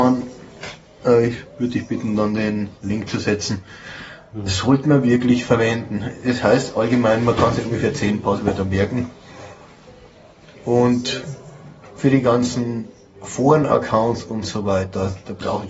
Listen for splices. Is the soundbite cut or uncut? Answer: uncut